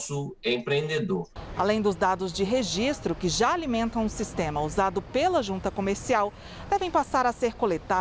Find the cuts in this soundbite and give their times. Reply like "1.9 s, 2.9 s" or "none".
1.5 s

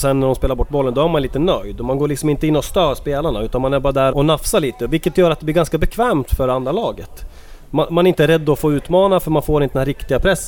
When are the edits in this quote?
4.1 s

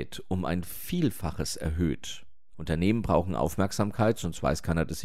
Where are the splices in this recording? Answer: 2.5 s

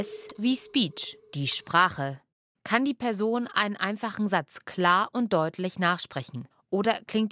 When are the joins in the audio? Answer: none

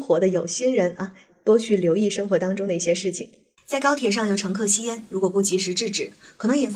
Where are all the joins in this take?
3.6 s

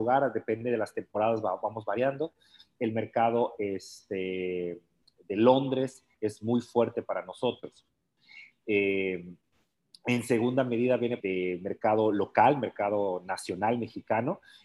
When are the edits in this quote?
8.5 s, 11.2 s

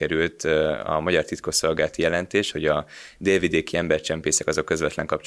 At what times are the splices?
2.5 s

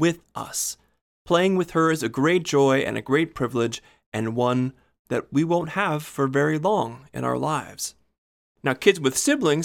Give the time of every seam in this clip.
8.6 s

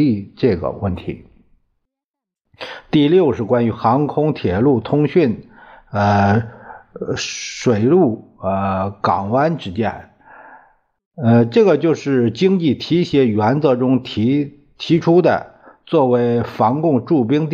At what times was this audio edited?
none

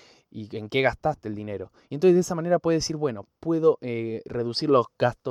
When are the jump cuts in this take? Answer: none

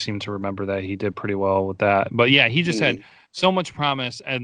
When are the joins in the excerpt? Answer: none

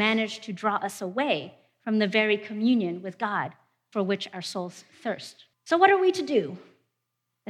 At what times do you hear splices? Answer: 5.5 s

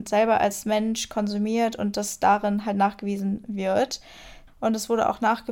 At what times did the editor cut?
4.5 s

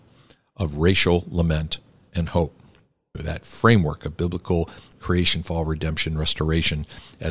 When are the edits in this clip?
3.1 s

